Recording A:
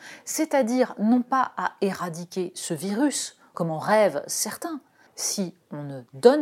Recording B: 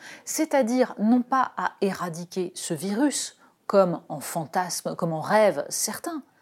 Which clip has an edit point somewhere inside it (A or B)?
A